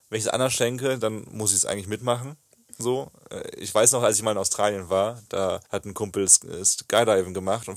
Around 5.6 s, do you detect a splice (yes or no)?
yes